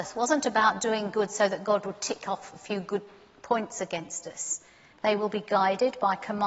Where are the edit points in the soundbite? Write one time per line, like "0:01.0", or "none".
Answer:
0:04.9